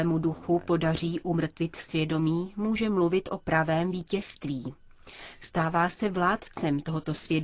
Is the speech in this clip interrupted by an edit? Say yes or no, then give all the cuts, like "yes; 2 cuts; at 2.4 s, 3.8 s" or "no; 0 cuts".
no; 0 cuts